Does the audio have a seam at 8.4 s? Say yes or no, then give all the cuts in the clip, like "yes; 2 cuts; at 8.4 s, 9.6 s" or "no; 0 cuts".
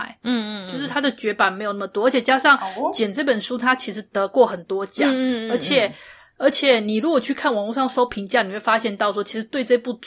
no; 0 cuts